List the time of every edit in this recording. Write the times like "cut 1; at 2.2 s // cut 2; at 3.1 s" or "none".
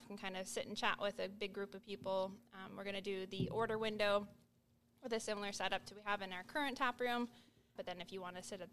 cut 1; at 7.8 s